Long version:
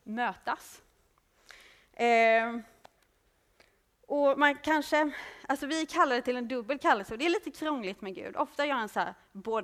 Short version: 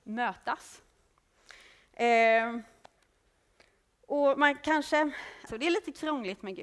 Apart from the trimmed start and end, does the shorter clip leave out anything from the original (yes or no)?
yes